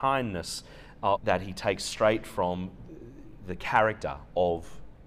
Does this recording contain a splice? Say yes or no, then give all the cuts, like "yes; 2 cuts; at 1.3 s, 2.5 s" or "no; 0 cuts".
yes; 1 cut; at 1.2 s